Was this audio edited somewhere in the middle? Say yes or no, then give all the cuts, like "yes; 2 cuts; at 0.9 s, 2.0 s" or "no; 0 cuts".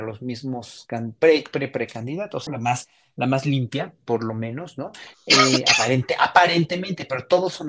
yes; 1 cut; at 2.5 s